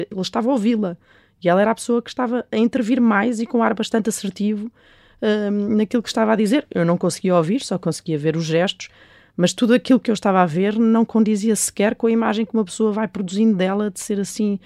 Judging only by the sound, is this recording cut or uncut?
uncut